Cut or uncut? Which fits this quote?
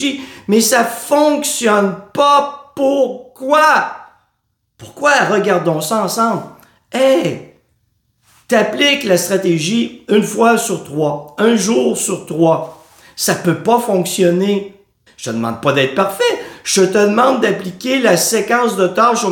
cut